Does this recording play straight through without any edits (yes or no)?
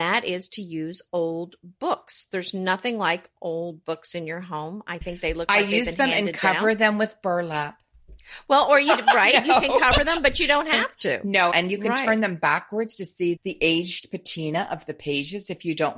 no